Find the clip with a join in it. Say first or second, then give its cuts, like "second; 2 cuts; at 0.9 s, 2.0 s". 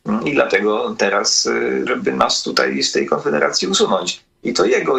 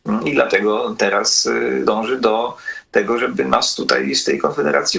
first; 1 cut; at 1.9 s